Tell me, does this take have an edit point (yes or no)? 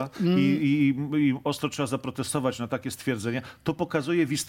no